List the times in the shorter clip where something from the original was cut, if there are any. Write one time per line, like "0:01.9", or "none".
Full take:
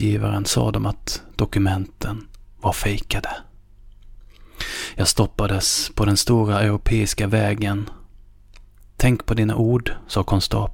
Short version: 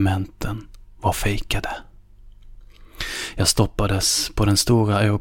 none